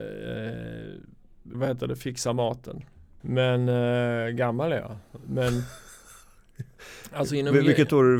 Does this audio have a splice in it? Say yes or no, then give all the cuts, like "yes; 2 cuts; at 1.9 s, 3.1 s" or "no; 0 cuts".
yes; 2 cuts; at 1.5 s, 3.2 s